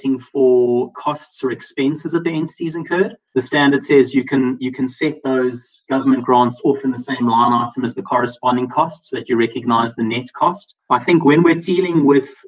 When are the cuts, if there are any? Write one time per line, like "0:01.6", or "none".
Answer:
none